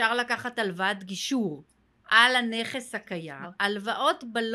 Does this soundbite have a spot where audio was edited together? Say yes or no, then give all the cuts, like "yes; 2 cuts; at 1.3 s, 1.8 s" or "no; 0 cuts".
yes; 1 cut; at 3.4 s